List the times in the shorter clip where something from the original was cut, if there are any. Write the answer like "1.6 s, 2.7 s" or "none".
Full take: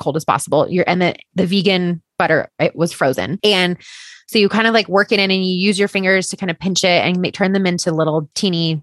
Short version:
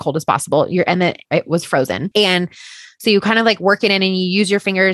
1.2 s